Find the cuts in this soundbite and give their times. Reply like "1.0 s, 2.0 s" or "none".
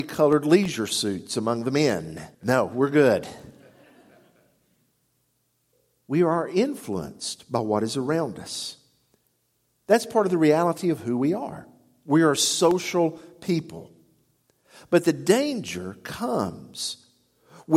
2.3 s